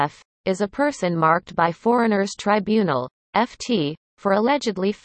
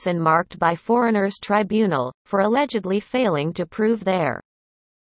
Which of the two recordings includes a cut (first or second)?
second